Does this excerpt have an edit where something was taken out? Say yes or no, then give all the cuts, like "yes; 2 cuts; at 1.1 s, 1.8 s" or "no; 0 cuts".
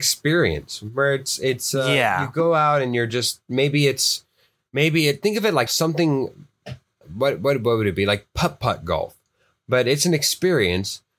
yes; 2 cuts; at 5.7 s, 9.6 s